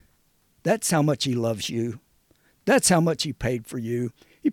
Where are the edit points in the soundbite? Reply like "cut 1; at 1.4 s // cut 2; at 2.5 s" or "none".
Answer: none

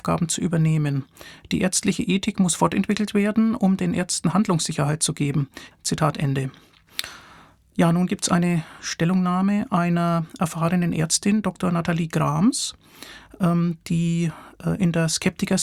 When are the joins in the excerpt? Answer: cut 1; at 5.7 s

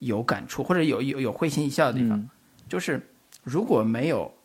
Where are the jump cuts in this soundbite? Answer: cut 1; at 2.7 s

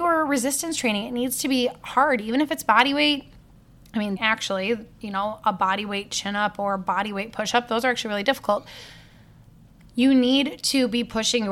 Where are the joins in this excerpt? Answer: cut 1; at 4.2 s

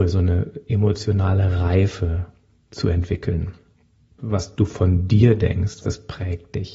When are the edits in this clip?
cut 1; at 4.2 s // cut 2; at 5.8 s

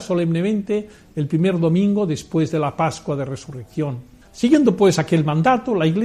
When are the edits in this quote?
cut 1; at 4.2 s

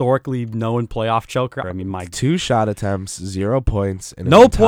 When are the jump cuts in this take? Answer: cut 1; at 1.6 s

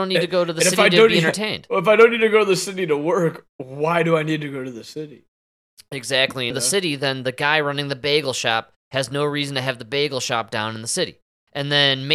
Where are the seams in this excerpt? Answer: cut 1; at 6.5 s

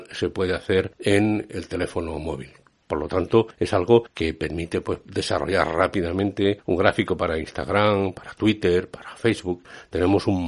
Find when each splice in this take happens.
cut 1; at 2.8 s

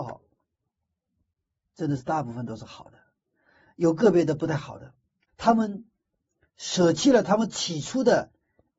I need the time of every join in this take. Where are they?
cut 1; at 5.3 s

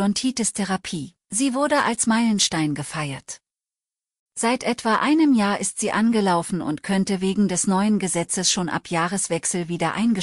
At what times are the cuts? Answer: cut 1; at 1.2 s

